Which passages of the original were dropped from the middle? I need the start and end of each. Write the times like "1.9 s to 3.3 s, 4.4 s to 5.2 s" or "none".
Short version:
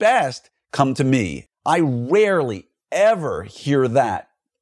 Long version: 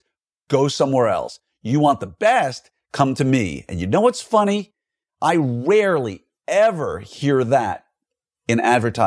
3.7 s to 5.0 s